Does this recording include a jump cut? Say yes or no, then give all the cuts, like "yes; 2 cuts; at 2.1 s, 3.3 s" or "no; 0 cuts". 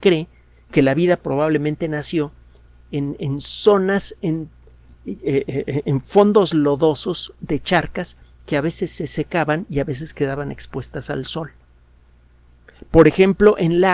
no; 0 cuts